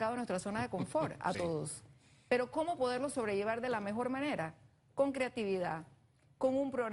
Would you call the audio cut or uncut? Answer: uncut